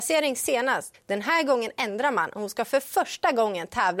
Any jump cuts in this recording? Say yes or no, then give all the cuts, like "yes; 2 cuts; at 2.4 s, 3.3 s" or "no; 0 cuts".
yes; 1 cut; at 0.9 s